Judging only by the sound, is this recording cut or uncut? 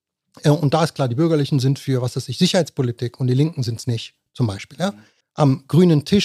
cut